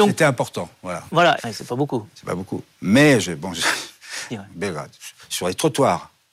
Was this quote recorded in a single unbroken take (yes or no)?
no